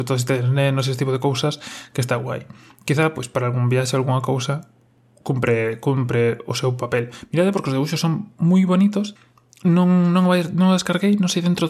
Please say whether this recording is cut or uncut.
uncut